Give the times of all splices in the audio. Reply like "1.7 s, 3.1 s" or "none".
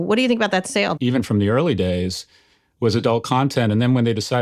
1.0 s